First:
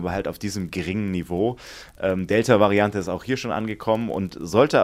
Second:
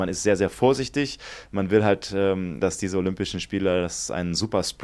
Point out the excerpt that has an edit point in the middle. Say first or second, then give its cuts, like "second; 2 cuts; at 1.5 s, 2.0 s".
second; 1 cut; at 2.6 s